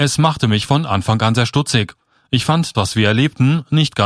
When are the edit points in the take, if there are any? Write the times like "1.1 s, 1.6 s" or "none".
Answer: 2.7 s